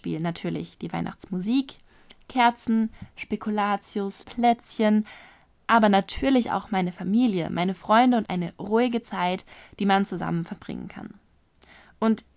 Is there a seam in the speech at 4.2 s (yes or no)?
yes